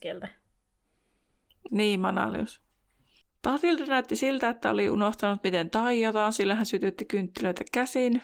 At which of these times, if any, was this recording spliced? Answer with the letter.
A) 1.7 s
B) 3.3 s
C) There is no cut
A